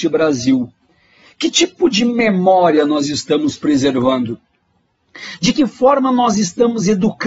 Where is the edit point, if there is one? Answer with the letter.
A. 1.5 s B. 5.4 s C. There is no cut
C